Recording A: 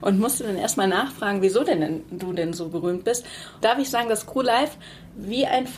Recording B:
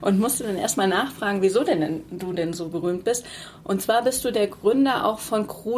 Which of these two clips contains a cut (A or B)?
A